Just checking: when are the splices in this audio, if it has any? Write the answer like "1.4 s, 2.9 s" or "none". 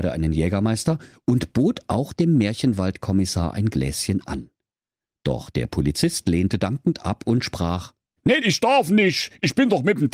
8.4 s

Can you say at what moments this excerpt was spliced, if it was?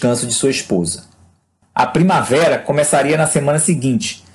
1.6 s

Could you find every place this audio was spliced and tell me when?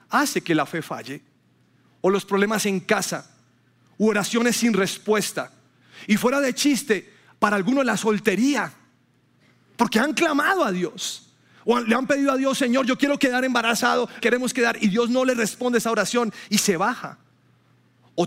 14.2 s

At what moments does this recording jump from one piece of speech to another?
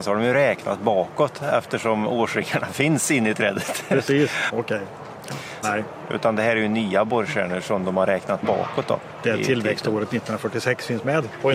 4.5 s, 5.6 s

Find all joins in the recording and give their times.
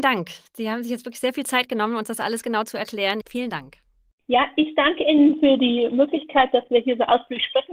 3.2 s

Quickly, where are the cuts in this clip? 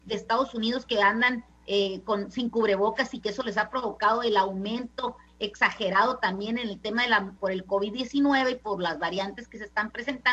7.4 s

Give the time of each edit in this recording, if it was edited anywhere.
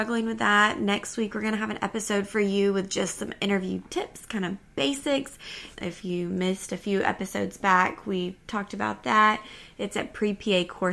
5.7 s

